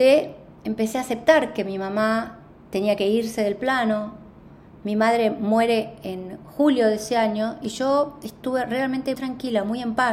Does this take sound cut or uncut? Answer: cut